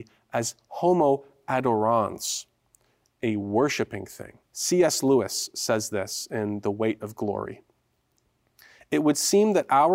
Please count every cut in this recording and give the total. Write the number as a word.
one